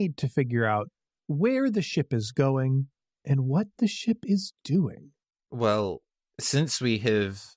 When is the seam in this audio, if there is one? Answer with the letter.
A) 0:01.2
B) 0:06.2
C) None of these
C